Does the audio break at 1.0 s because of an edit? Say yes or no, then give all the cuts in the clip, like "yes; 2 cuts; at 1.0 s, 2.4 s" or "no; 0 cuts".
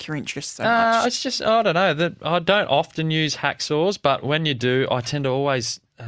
no; 0 cuts